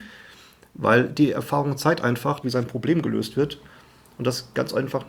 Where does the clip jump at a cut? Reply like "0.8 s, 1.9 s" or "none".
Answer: 2.4 s